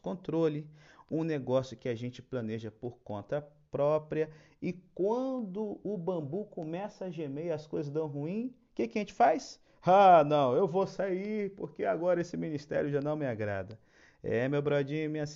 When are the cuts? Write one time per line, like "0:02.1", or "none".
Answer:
none